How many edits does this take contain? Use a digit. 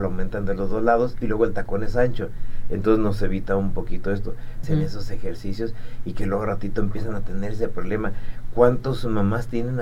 1